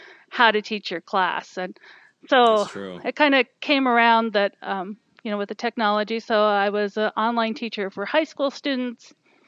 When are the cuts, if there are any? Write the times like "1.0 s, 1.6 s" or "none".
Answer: none